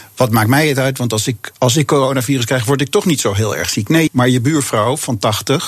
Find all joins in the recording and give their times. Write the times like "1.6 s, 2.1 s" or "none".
4.1 s